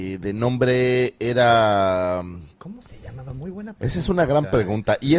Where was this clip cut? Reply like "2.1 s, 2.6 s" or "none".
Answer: none

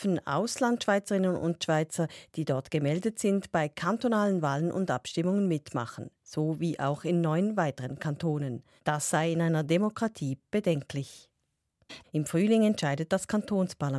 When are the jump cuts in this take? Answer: 8.8 s, 12.0 s

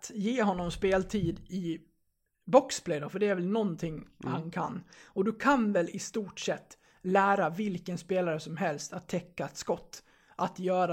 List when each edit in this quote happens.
none

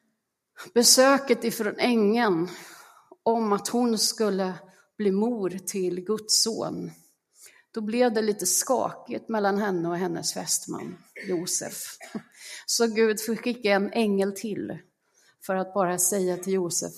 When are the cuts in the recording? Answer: none

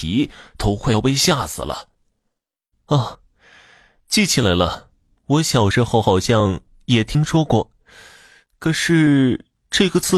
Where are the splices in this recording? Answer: 2.7 s

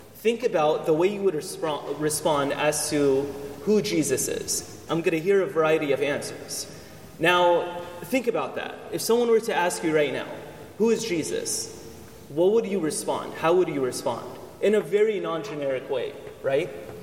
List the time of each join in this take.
4.9 s

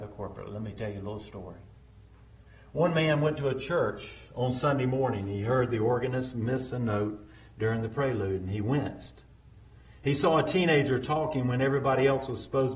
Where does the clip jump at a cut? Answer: none

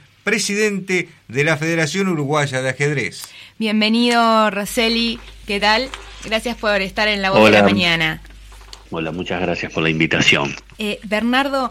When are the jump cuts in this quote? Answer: 8.9 s, 10.7 s

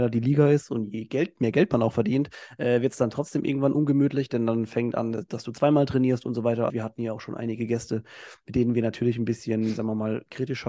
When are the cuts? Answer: 6.7 s

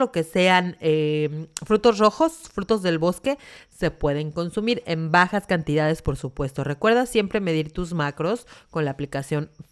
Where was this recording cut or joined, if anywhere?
none

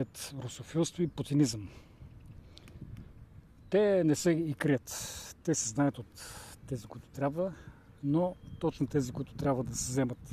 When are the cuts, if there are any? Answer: none

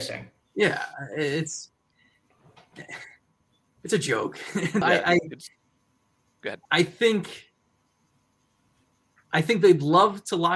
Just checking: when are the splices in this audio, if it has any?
4.8 s, 6.6 s

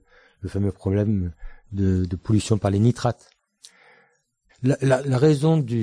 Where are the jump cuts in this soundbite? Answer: 4.5 s

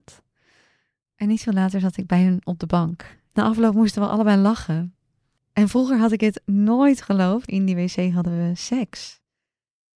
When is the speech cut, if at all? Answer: 3.3 s, 5.4 s, 7.5 s

